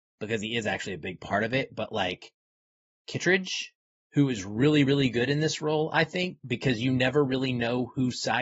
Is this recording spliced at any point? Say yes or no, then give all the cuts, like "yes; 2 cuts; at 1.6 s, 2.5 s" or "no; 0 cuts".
no; 0 cuts